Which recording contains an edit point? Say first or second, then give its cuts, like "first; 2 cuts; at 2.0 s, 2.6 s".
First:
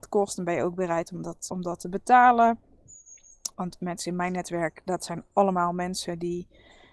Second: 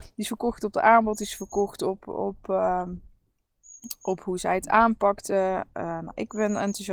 first; 2 cuts; at 1.5 s, 3.5 s